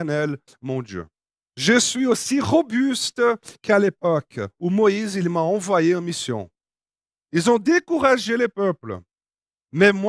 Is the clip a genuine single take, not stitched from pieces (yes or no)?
no